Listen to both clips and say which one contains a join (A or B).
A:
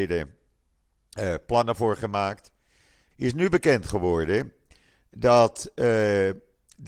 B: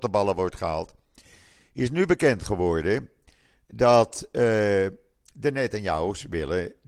A